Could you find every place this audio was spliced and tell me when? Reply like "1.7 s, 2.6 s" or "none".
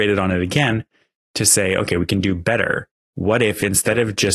none